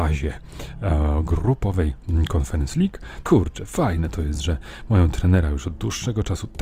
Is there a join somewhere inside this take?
yes; 1 cut; at 3.2 s

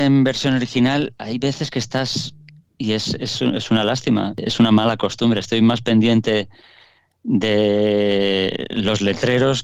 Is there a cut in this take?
no; 0 cuts

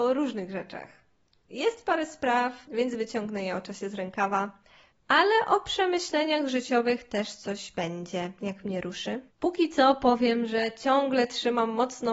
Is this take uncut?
no; 3 cuts; at 2.7 s, 4.9 s, 9.3 s

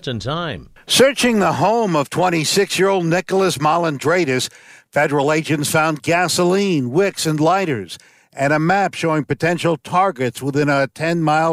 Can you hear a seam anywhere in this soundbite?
no; 0 cuts

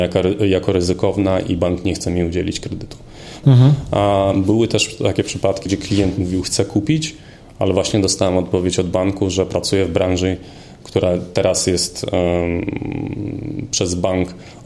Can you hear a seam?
yes; 2 cuts; at 3.4 s, 5.7 s

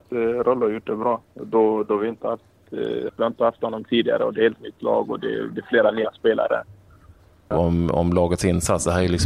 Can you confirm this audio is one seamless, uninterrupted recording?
no; 2 cuts; at 3.1 s, 7.5 s

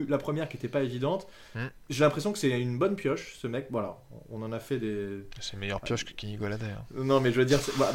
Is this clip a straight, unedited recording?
yes; 0 cuts

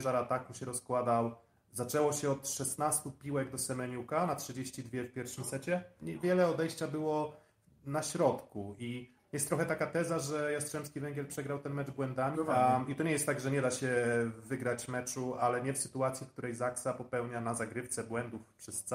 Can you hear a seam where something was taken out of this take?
yes; 2 cuts; at 6.0 s, 12.3 s

